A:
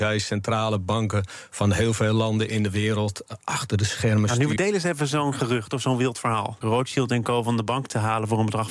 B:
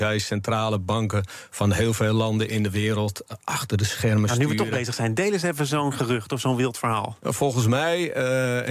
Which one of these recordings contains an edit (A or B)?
A